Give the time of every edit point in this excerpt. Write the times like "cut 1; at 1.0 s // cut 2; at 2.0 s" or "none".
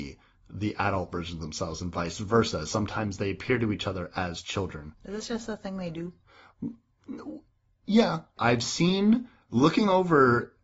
cut 1; at 4.9 s // cut 2; at 8.4 s